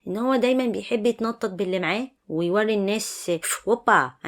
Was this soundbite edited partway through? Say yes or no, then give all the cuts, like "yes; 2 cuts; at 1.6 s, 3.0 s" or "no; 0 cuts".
yes; 1 cut; at 2.2 s